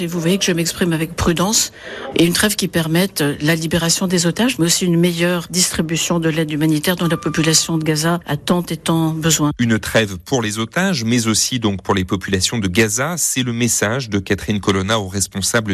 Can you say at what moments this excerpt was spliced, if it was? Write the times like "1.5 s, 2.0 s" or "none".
2.1 s